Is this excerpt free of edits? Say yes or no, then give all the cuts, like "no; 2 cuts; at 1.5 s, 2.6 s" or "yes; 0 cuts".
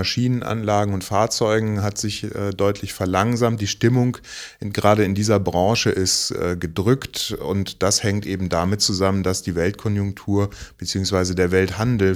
yes; 0 cuts